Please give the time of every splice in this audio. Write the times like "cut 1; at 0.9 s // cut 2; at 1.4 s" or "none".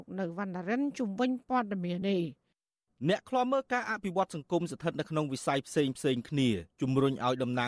cut 1; at 2.0 s